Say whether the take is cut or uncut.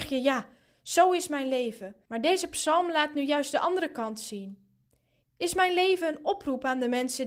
cut